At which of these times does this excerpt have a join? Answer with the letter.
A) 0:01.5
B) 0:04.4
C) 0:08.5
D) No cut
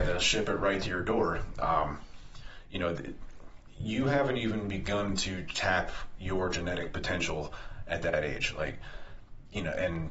D